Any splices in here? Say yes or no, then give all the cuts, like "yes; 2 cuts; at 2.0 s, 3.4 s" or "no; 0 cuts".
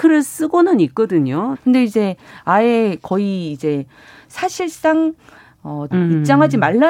yes; 2 cuts; at 1.5 s, 5.9 s